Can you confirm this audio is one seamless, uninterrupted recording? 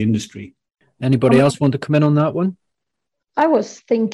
yes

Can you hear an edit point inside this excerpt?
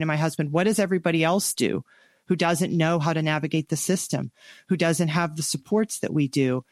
no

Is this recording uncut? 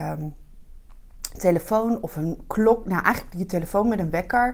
yes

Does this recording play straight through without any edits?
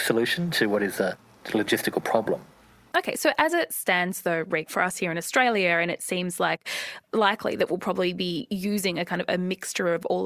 no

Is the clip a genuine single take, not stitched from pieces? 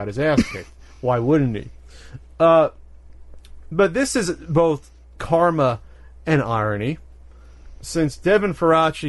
yes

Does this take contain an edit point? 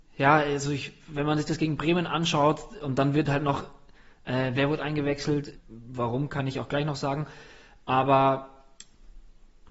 yes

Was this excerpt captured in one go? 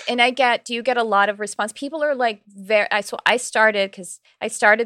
yes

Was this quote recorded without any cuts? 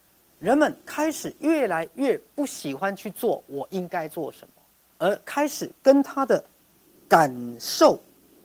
yes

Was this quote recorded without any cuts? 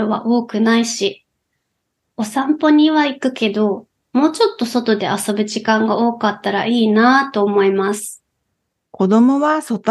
yes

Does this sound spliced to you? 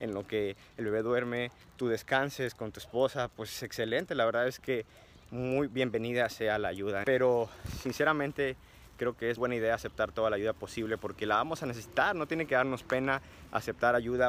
yes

